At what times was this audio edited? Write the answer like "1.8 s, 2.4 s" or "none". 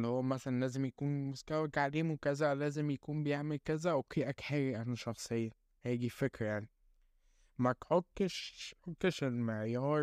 8.8 s